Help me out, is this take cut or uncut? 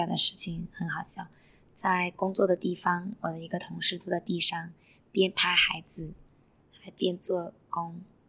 uncut